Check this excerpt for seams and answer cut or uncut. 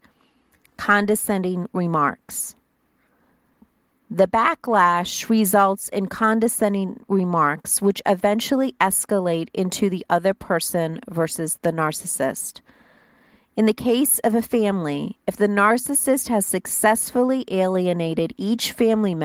uncut